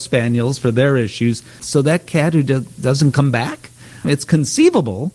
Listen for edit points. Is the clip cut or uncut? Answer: cut